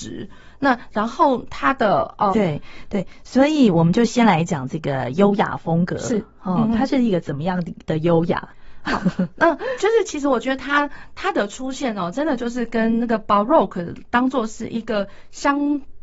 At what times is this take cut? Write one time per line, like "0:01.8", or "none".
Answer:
0:02.3